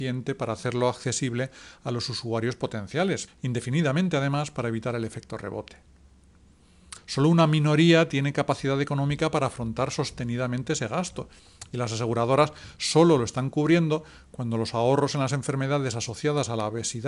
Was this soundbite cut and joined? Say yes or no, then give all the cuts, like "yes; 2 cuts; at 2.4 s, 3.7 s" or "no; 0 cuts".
yes; 2 cuts; at 3.3 s, 7.0 s